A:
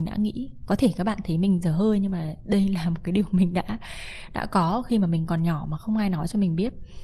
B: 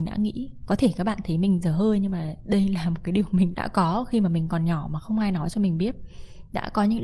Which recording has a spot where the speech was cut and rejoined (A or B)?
B